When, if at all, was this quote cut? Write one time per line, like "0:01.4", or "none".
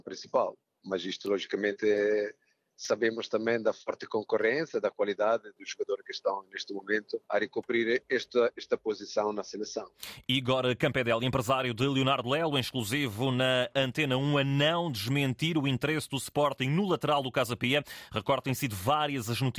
0:07.2